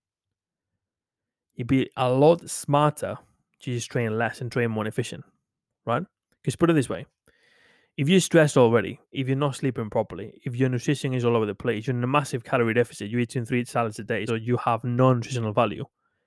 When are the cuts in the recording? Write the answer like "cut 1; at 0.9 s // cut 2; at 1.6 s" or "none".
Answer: cut 1; at 14.3 s